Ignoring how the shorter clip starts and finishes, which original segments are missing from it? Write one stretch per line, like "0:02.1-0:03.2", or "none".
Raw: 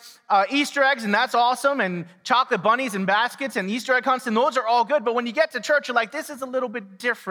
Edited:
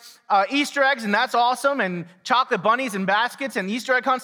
none